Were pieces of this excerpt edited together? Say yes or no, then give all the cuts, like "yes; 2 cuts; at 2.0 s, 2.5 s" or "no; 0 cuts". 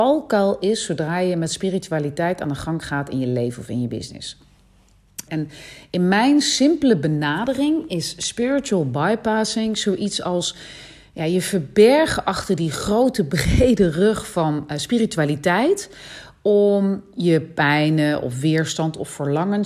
yes; 1 cut; at 5.3 s